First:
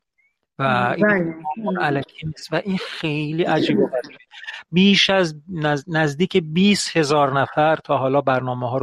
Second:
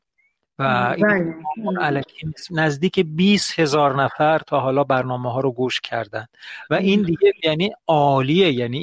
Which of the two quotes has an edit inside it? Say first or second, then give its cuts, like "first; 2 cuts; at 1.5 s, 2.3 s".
second; 1 cut; at 2.5 s